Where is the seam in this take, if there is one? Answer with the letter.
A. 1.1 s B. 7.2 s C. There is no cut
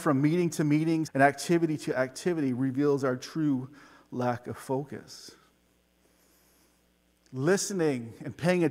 A